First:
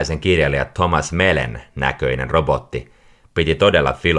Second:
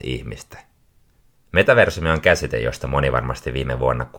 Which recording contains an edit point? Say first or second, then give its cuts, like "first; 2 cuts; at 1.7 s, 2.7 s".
second; 1 cut; at 1.3 s